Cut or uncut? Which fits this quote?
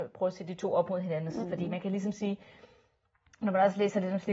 cut